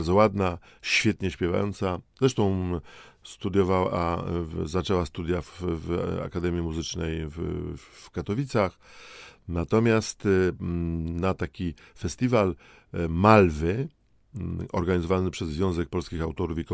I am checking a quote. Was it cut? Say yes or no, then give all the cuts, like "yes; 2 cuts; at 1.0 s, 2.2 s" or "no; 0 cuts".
no; 0 cuts